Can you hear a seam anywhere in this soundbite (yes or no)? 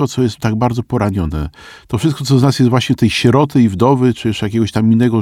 no